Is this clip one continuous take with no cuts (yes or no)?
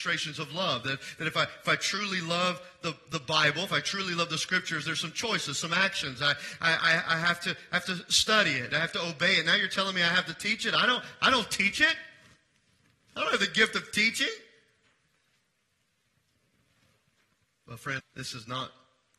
no